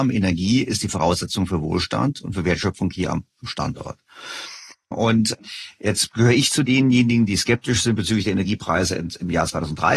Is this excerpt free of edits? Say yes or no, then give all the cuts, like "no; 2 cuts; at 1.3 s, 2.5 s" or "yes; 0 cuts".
no; 1 cut; at 4.9 s